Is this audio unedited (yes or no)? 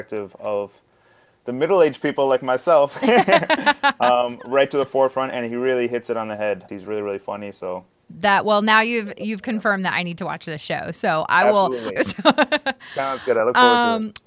no